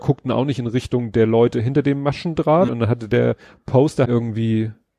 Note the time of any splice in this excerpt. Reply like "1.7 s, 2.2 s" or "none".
2.7 s, 4.0 s